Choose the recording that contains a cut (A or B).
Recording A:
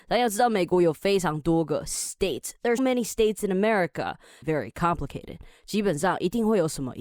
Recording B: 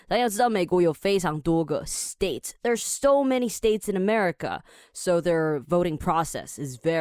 A